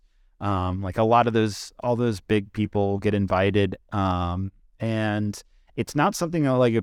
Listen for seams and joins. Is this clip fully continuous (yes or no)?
yes